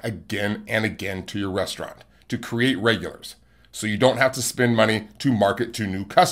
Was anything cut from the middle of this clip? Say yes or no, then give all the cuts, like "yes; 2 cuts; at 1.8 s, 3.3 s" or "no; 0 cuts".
no; 0 cuts